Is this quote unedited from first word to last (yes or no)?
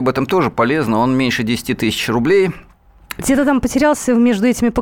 no